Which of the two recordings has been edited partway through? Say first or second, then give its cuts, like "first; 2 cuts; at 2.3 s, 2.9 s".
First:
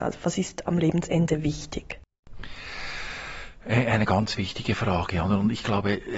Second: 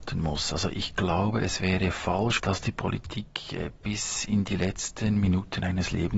second; 1 cut; at 2.4 s